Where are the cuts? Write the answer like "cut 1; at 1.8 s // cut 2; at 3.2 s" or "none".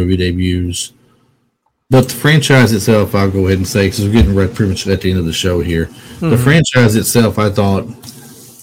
cut 1; at 1.8 s

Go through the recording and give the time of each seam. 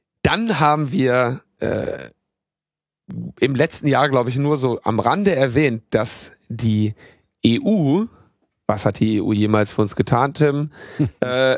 none

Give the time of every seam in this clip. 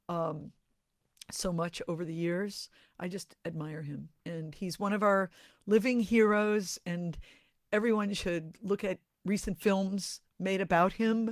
none

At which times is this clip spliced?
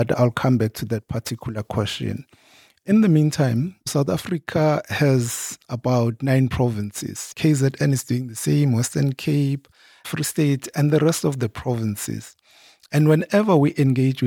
cut 1; at 7.3 s

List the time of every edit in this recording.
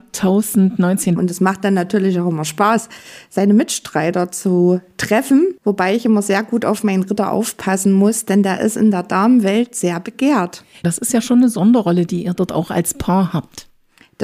cut 1; at 1.2 s // cut 2; at 5.6 s // cut 3; at 10.8 s

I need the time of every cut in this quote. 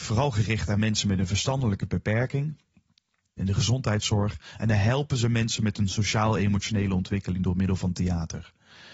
cut 1; at 3.4 s

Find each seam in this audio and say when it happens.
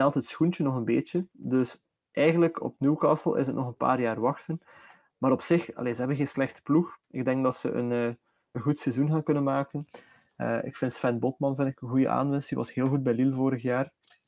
none

